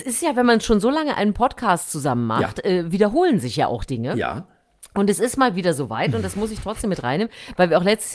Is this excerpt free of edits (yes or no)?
yes